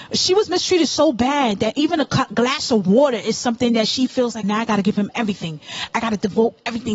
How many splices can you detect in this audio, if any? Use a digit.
1